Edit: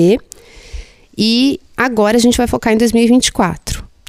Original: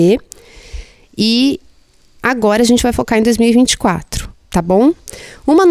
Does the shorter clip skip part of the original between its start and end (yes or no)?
yes